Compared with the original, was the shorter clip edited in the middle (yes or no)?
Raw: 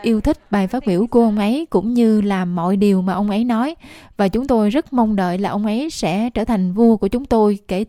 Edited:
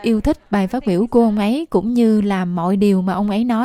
no